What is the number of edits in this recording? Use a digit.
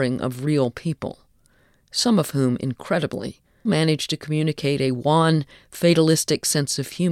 1